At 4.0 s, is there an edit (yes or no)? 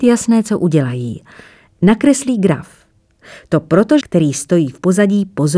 yes